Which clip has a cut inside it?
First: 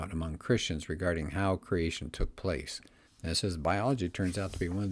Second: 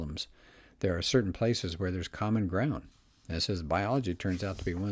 first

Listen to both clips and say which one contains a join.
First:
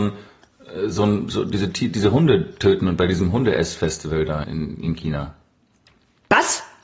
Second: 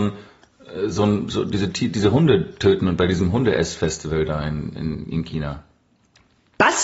first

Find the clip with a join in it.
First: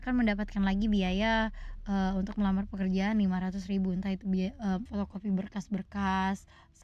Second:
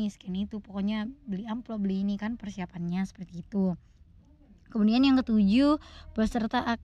first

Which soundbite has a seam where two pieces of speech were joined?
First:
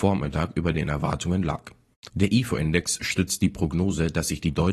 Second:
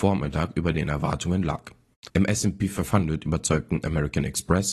second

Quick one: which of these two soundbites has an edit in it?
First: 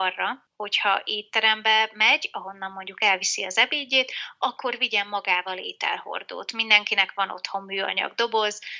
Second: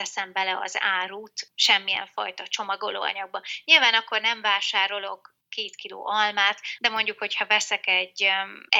second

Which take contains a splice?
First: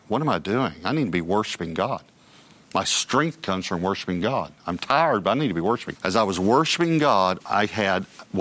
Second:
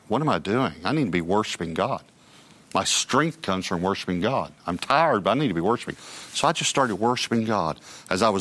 first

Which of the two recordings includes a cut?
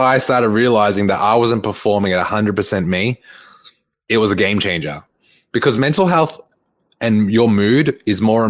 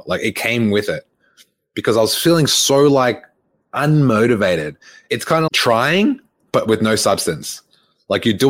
second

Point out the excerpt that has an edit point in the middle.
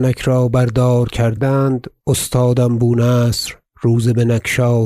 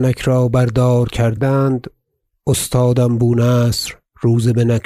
first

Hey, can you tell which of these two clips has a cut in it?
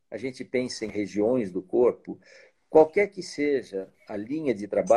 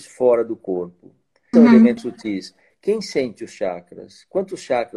second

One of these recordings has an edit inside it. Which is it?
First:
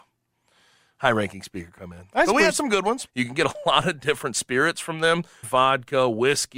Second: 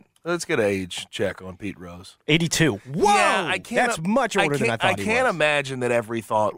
first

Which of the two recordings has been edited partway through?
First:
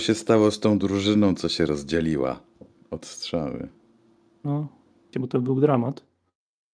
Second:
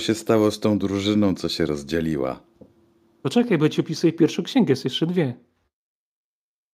first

